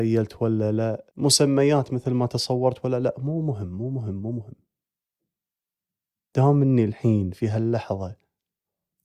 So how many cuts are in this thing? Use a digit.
1